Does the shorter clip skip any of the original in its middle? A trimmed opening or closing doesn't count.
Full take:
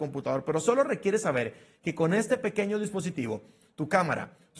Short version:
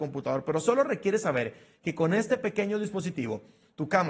no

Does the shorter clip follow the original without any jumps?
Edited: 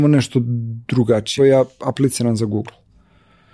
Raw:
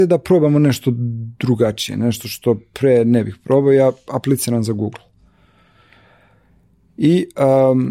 no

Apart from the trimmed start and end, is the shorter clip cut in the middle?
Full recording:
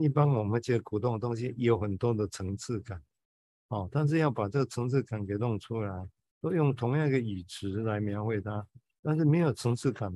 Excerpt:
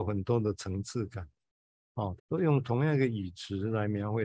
yes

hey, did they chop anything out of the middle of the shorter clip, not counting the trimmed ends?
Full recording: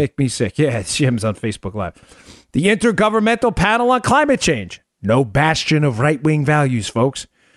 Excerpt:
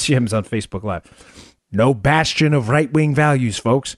yes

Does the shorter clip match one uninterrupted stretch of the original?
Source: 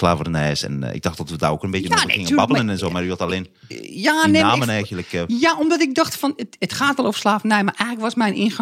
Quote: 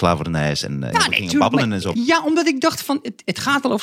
no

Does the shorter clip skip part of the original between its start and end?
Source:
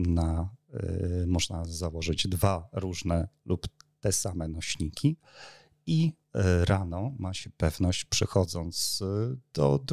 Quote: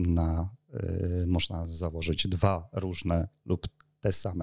no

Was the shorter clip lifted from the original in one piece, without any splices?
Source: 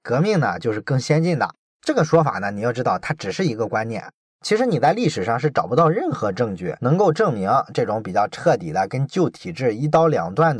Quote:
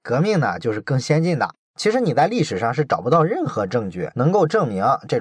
no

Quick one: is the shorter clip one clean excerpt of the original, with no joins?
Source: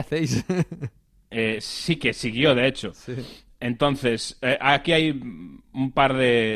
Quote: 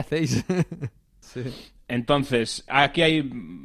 no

